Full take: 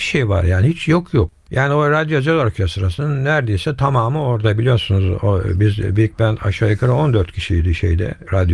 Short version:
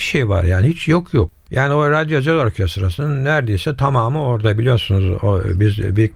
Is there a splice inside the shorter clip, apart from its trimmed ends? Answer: no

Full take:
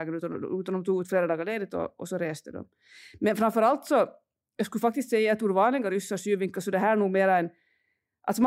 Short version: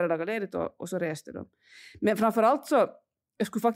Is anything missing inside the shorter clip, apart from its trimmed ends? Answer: no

